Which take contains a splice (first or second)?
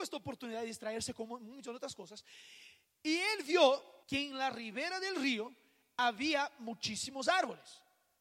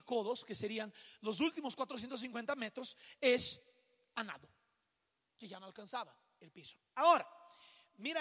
first